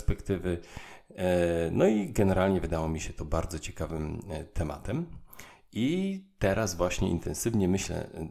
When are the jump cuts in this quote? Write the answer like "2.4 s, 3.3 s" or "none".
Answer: none